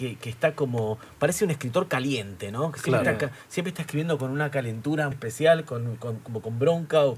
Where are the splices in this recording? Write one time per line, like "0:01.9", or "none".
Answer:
0:05.1